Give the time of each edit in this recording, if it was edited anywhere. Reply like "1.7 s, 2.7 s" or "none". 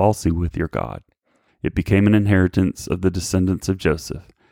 1.5 s